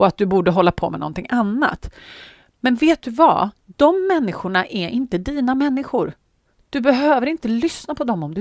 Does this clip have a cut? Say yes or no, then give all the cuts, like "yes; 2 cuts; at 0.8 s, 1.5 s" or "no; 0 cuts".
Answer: yes; 1 cut; at 3.6 s